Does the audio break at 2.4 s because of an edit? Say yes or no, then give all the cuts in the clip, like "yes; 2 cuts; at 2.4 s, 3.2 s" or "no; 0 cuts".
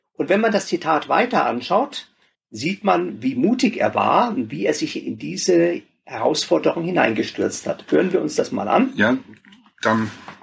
yes; 1 cut; at 2.4 s